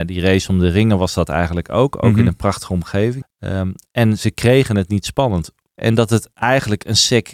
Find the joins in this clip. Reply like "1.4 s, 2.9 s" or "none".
3.2 s, 5.7 s